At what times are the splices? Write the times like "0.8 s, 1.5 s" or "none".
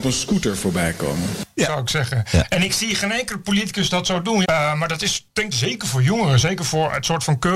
1.6 s, 4.4 s, 5.5 s